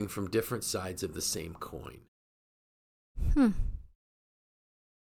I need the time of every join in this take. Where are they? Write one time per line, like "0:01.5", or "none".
none